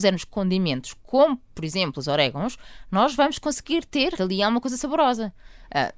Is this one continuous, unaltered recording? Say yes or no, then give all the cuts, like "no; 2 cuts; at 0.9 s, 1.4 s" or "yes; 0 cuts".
no; 1 cut; at 4.2 s